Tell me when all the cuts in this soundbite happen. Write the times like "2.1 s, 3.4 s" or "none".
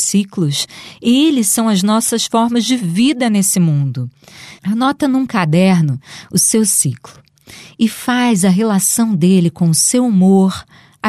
4.6 s